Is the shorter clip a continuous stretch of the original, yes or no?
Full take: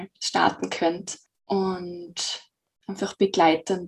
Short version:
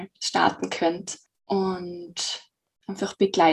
yes